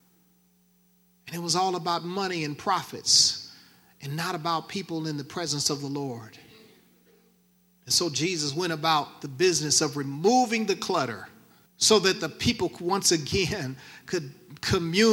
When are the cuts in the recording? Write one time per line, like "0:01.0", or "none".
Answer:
0:11.7